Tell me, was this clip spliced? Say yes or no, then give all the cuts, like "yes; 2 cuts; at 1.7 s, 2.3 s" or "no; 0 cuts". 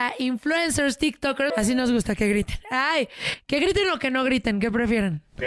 yes; 1 cut; at 1.5 s